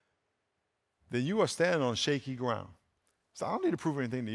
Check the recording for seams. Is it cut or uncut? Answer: cut